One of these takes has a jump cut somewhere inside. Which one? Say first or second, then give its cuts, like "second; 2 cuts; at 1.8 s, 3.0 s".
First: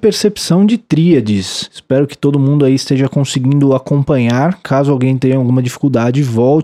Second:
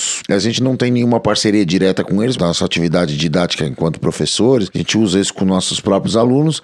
second; 1 cut; at 2.3 s